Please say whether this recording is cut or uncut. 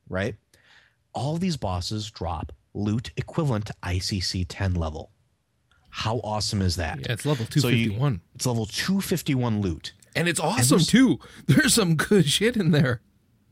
cut